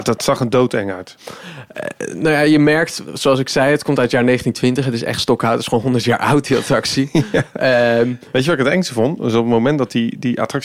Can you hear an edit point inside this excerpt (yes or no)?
no